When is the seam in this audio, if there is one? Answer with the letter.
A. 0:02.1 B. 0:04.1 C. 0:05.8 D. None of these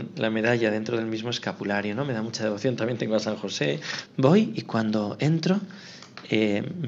B